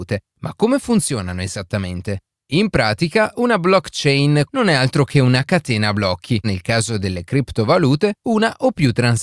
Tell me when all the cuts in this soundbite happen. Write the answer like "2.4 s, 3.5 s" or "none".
4.4 s, 6.4 s